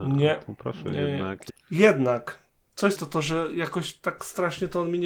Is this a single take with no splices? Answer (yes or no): no